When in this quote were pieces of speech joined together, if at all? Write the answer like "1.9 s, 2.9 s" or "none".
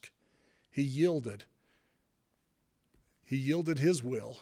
none